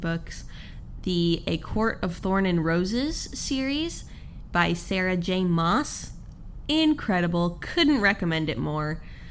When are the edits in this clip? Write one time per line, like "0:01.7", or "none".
none